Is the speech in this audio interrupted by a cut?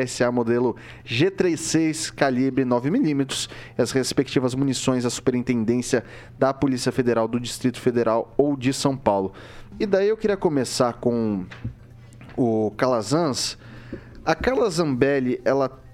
yes; 1 cut; at 9.7 s

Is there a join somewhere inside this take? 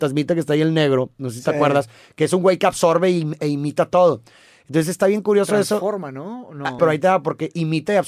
yes; 1 cut; at 6.8 s

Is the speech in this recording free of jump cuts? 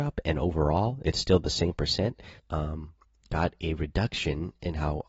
no; 1 cut; at 2.4 s

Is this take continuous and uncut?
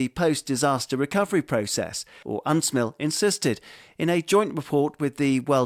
no; 1 cut; at 2.2 s

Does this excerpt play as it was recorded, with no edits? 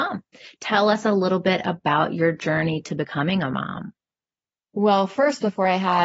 yes; 0 cuts

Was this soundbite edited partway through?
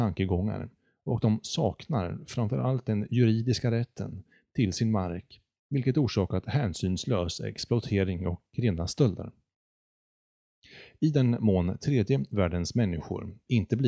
no; 0 cuts

